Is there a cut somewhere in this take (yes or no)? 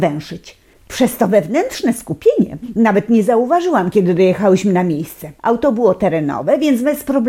yes